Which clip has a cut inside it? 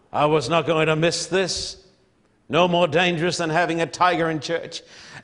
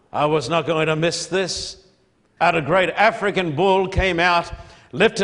second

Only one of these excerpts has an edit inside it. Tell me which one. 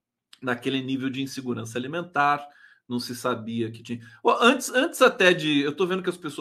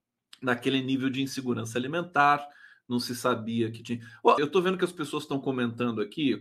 second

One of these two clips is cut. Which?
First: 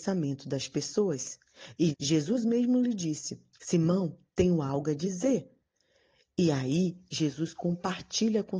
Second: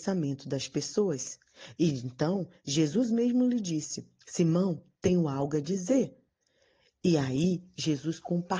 first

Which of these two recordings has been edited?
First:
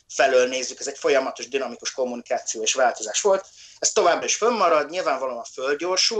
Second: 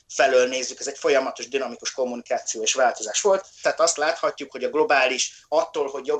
second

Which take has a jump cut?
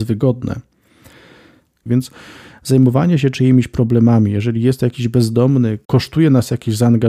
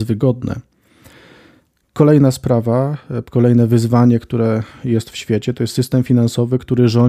first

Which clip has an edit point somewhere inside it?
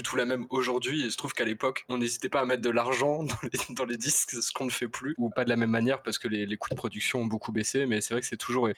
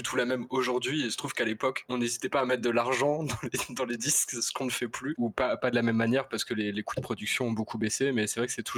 first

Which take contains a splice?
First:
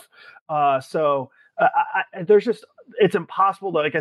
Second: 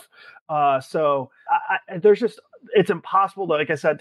second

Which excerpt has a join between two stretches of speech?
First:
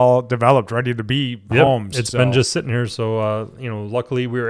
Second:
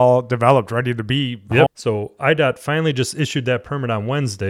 second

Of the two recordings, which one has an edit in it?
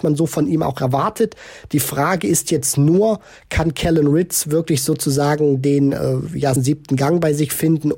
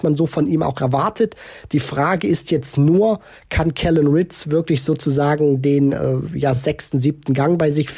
first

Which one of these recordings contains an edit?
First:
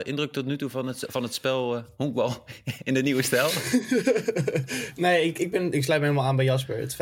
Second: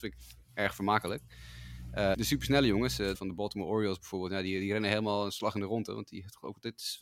second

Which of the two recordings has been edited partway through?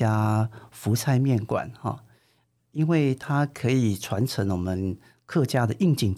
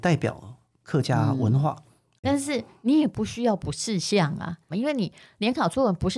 second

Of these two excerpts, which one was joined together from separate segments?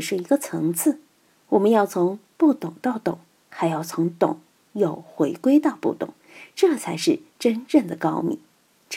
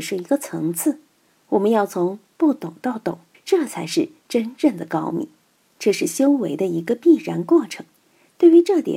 second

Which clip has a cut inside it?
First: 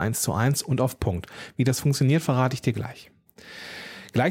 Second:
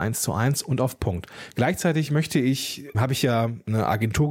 second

